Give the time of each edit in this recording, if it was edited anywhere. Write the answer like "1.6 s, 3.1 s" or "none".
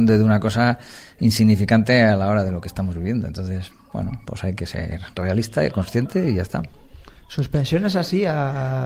none